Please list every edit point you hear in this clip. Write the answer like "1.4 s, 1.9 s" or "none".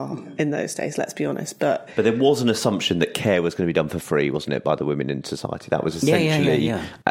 none